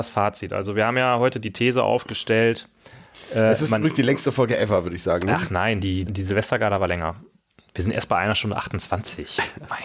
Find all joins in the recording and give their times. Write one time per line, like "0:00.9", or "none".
0:06.1